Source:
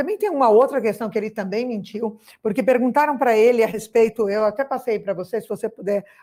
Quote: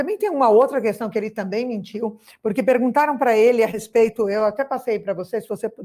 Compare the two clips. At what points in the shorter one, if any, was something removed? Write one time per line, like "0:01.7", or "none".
none